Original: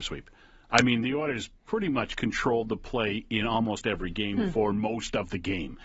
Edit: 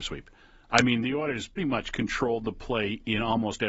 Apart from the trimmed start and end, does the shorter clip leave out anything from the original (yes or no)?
yes